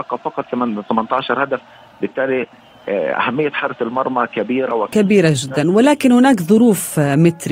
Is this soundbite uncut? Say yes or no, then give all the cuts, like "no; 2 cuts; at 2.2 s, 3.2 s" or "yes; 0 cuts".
yes; 0 cuts